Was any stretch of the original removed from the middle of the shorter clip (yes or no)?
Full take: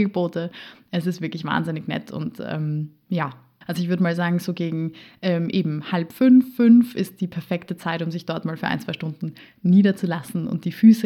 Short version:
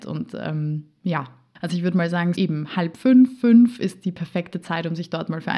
yes